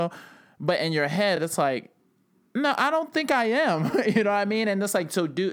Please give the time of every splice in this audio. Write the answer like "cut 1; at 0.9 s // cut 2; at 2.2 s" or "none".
none